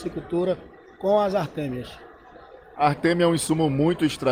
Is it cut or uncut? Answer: cut